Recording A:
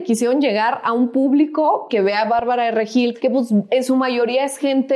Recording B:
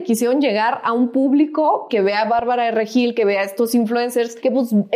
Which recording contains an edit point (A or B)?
A